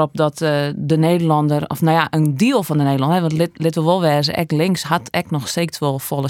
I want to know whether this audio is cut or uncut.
uncut